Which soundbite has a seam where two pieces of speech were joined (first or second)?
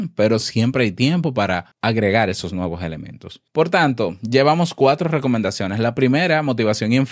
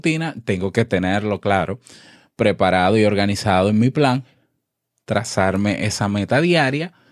first